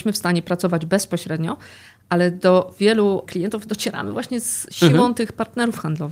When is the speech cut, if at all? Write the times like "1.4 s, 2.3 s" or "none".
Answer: 3.3 s